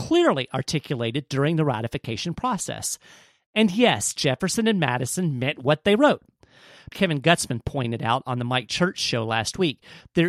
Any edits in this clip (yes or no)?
yes